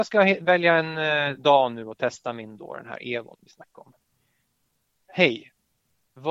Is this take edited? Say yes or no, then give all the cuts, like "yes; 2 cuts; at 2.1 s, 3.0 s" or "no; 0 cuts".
no; 0 cuts